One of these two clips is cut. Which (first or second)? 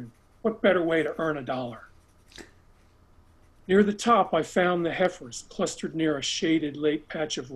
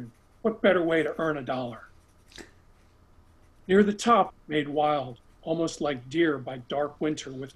second